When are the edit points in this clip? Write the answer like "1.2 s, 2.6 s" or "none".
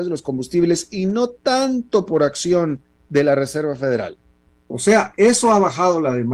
4.5 s